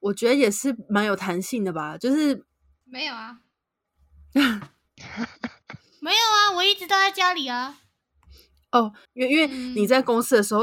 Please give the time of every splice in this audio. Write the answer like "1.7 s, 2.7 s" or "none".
2.8 s, 9.1 s